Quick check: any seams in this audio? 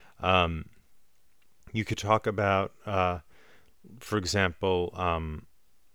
no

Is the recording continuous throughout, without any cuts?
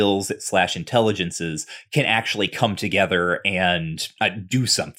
yes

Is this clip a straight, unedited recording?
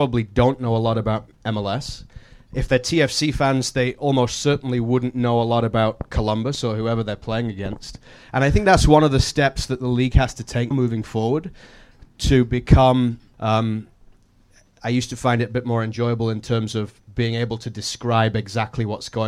no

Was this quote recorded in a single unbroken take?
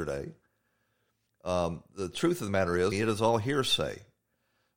no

